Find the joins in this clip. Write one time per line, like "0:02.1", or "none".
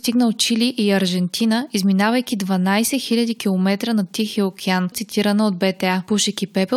0:04.9

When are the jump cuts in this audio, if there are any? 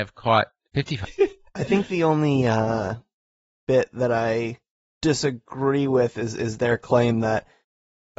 0:01.0

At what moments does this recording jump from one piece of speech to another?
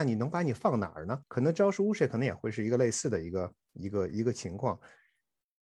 0:01.2
0:03.6

